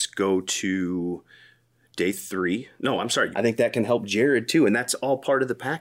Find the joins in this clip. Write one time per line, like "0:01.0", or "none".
0:03.3